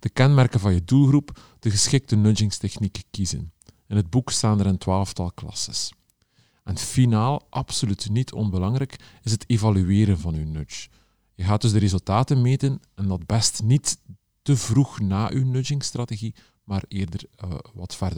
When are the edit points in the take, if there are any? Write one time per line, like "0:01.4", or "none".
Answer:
none